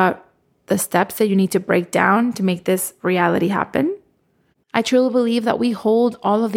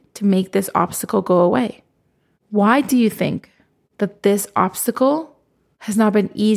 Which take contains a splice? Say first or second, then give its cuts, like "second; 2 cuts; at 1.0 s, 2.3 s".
first; 1 cut; at 4.6 s